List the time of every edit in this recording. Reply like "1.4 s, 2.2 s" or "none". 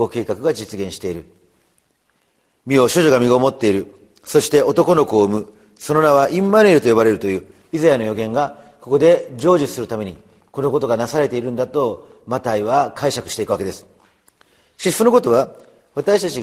none